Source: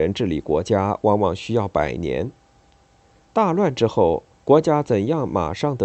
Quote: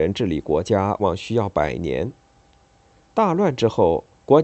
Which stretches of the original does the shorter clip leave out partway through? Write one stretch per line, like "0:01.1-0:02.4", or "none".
0:01.0-0:01.2